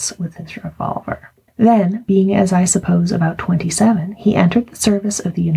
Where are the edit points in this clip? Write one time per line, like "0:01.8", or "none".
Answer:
0:01.5